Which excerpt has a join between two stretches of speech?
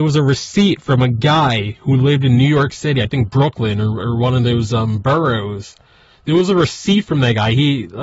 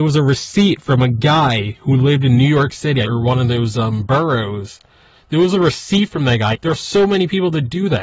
second; 2 cuts; at 3.0 s, 6.5 s

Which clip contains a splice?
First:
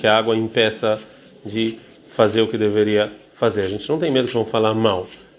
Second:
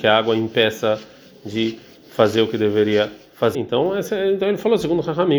second; 1 cut; at 3.5 s

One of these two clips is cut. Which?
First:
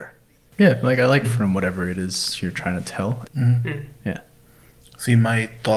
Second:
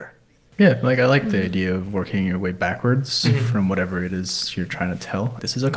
first; 2 cuts; at 1.2 s, 3.3 s

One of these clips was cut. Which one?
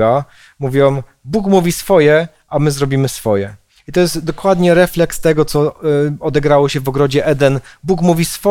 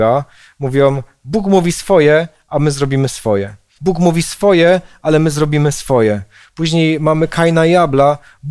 second; 1 cut; at 3.8 s

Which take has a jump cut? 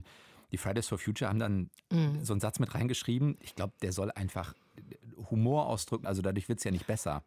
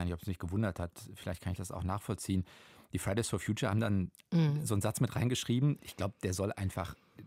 first; 1 cut; at 6.0 s

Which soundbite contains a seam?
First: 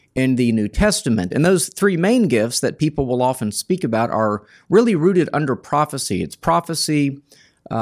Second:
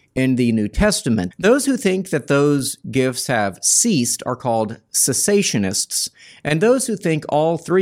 second; 1 cut; at 1.3 s

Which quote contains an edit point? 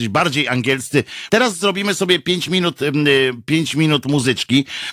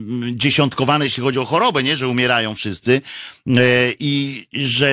first; 1 cut; at 1.3 s

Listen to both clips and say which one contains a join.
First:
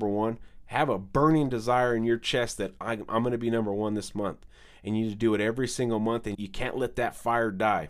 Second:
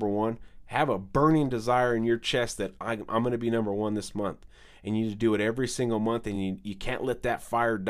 first; 1 cut; at 6.3 s

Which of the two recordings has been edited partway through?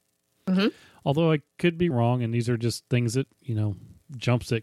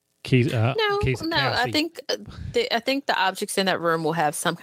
first; 1 cut; at 1.9 s

